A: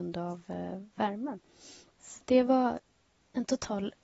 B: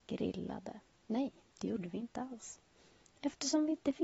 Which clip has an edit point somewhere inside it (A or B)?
A